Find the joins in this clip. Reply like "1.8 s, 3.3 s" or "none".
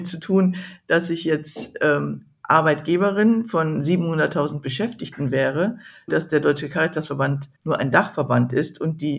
6.1 s, 7.6 s